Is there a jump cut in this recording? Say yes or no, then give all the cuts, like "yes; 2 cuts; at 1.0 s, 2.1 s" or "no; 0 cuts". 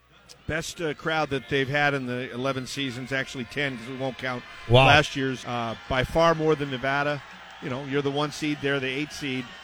yes; 1 cut; at 5.4 s